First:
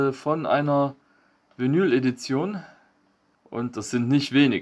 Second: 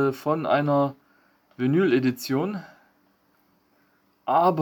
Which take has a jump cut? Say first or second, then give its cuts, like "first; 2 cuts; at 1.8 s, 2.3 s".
first; 1 cut; at 3.3 s